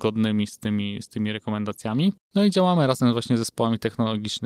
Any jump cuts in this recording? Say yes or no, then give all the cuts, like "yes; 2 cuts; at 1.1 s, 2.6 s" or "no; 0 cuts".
no; 0 cuts